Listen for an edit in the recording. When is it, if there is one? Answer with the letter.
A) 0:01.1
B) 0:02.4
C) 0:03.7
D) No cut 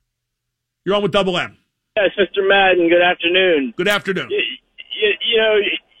D